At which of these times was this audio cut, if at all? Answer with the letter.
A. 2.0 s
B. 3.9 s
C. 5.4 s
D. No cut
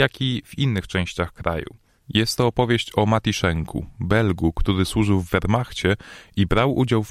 A